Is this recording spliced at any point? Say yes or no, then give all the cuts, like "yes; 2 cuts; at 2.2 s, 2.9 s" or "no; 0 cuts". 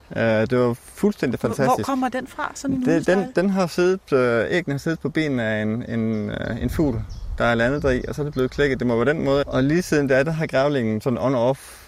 yes; 1 cut; at 9.4 s